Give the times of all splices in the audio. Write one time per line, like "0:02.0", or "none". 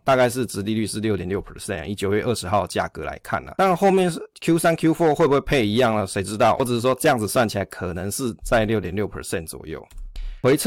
0:06.6

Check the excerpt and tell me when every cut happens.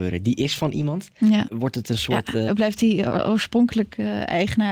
0:01.4
0:02.5

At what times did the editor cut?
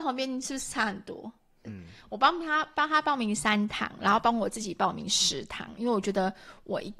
0:01.6

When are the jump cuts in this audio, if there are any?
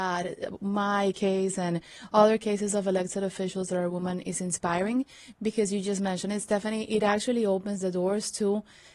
none

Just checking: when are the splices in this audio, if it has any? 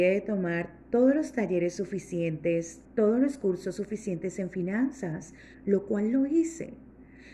none

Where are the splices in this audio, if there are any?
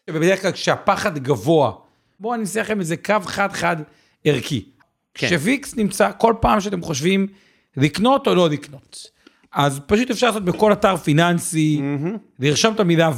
none

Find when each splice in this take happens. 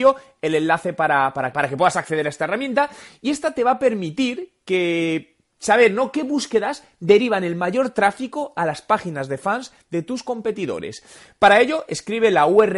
0:01.5

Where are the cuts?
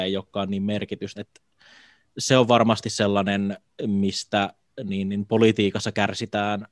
0:01.2

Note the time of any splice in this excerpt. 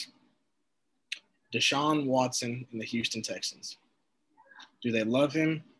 none

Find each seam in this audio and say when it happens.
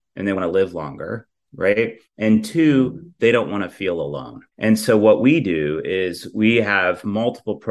0:04.5

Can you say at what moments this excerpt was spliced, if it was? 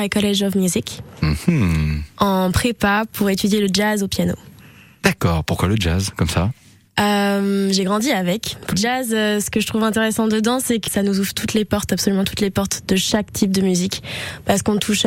0:08.7
0:10.9

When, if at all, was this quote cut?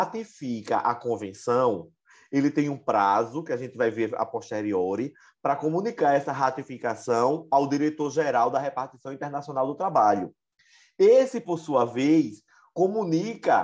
none

